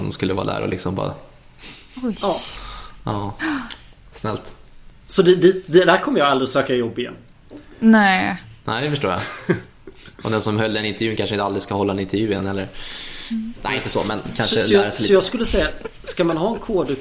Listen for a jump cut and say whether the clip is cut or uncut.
cut